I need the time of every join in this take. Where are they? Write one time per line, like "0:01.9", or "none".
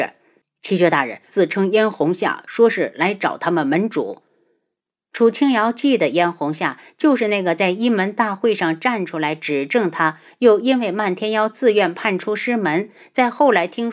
0:01.3